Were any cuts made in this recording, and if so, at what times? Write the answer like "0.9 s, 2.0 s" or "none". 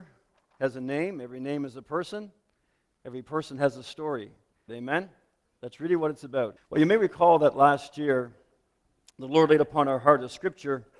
4.7 s, 6.6 s